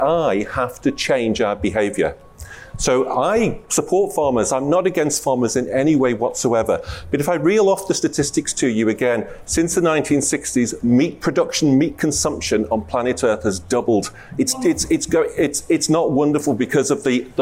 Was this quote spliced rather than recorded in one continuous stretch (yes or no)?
no